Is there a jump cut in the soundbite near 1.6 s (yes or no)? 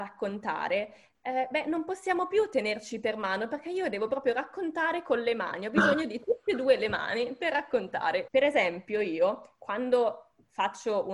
no